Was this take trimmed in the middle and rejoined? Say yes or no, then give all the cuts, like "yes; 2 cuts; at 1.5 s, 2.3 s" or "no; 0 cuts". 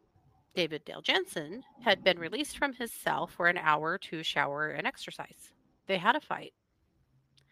yes; 1 cut; at 5.8 s